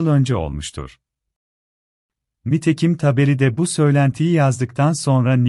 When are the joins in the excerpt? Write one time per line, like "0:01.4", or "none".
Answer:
none